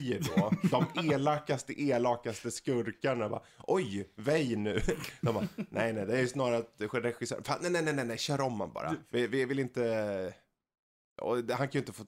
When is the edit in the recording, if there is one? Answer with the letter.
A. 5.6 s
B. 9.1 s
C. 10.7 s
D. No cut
D